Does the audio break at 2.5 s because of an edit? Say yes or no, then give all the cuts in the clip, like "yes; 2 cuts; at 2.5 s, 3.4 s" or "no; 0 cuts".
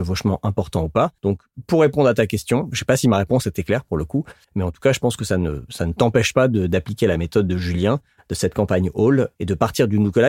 no; 2 cuts; at 1.2 s, 4.4 s